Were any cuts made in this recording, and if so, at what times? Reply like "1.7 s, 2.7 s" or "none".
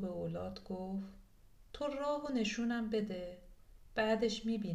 1.7 s